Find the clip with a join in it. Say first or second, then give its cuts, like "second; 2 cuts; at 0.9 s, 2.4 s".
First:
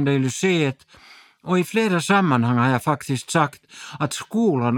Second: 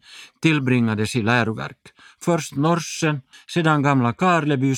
second; 1 cut; at 3.3 s